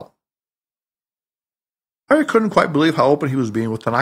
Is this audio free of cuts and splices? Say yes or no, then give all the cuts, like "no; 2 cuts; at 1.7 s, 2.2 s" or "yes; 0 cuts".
yes; 0 cuts